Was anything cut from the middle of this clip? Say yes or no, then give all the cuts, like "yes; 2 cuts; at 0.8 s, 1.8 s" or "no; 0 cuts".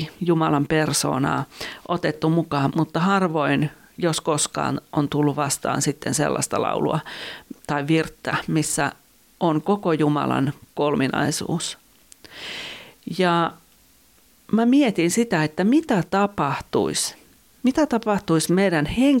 yes; 1 cut; at 2.7 s